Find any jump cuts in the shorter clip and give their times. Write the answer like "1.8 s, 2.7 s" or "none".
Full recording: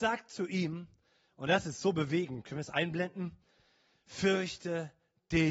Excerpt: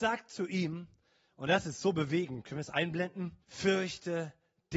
3.4 s